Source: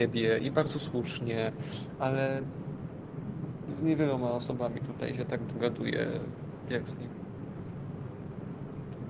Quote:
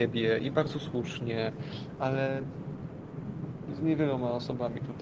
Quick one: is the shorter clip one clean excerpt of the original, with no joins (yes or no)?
yes